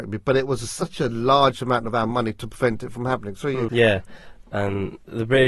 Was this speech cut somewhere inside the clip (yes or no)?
yes